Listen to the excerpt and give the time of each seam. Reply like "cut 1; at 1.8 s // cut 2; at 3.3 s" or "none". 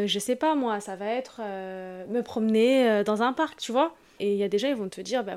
cut 1; at 4.2 s